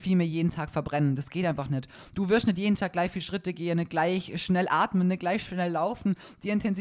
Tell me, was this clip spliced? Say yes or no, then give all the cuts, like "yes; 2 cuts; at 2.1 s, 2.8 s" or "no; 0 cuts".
no; 0 cuts